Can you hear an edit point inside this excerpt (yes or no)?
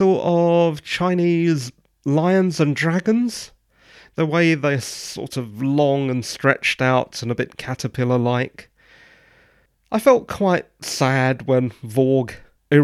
no